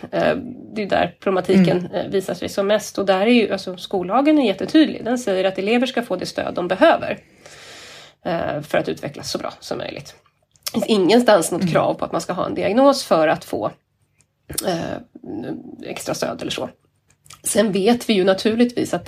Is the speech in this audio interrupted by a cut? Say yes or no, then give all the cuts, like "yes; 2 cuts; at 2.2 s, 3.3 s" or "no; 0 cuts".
no; 0 cuts